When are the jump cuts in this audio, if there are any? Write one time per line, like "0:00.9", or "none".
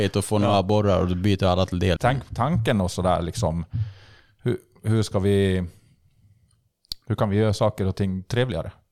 0:02.0